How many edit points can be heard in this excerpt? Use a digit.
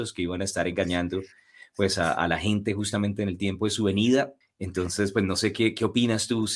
1